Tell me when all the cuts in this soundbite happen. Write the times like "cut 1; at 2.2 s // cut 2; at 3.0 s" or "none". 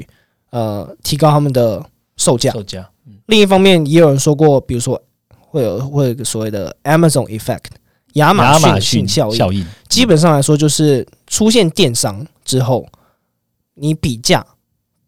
none